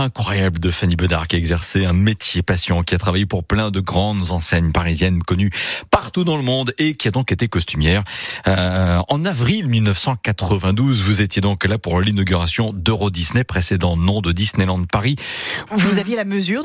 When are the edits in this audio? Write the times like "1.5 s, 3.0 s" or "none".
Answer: 15.7 s